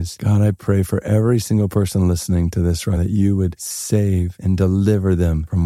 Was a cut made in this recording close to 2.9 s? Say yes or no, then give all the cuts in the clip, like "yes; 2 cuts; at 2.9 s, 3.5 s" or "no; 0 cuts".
yes; 1 cut; at 2.9 s